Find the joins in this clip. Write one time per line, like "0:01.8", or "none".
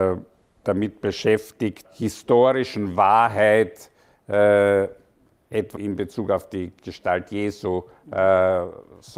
0:01.8
0:05.8